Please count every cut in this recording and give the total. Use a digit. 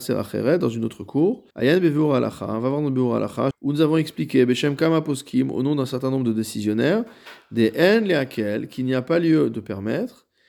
2